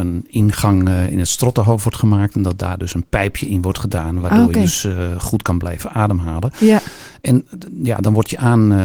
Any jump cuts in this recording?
no; 0 cuts

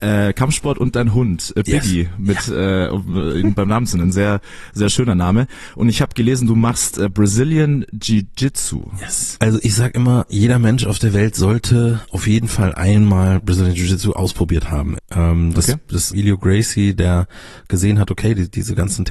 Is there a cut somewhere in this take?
yes; 3 cuts; at 9.4 s, 15.0 s, 16.1 s

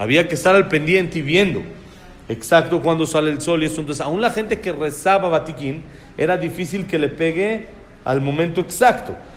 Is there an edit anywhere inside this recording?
no; 0 cuts

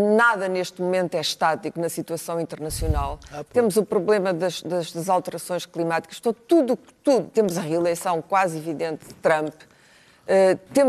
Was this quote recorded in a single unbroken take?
yes; 0 cuts

